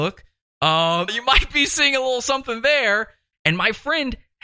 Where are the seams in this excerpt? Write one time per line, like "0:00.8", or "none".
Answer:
0:01.1
0:03.3